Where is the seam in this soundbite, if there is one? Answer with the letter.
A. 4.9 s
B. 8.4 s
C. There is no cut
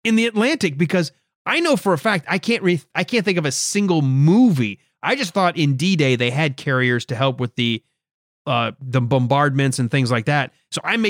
C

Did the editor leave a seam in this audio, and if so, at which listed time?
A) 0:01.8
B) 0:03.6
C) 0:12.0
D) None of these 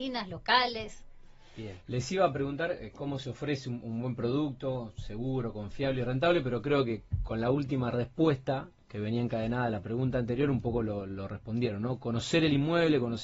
D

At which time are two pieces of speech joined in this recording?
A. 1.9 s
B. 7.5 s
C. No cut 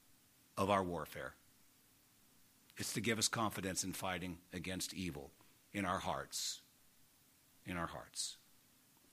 C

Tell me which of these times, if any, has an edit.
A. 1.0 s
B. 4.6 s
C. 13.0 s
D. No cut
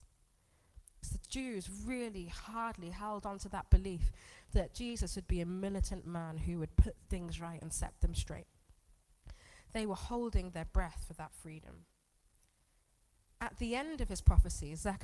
A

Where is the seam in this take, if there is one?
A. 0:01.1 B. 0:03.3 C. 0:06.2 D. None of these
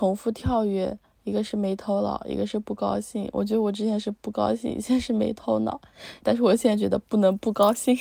C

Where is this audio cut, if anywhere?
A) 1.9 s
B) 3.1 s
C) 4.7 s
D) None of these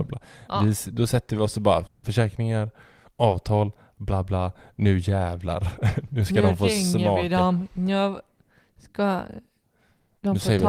A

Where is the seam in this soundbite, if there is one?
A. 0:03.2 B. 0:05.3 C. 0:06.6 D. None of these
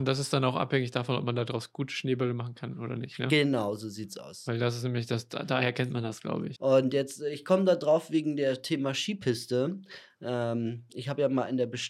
C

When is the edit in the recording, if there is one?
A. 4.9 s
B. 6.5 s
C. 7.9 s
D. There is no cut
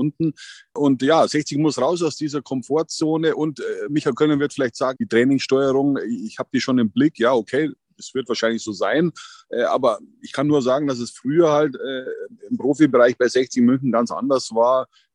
A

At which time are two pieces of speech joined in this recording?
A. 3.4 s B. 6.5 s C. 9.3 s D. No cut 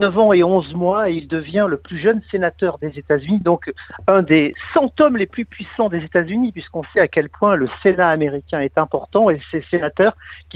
D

